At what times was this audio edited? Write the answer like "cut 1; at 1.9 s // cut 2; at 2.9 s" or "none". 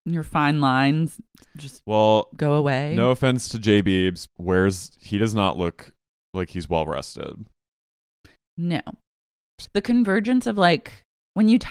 cut 1; at 4.3 s // cut 2; at 9.6 s